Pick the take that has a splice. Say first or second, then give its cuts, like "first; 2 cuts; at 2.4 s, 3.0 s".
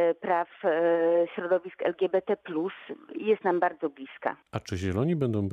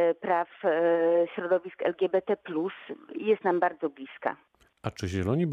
first; 1 cut; at 4.4 s